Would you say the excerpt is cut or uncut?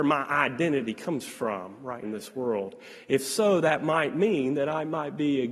cut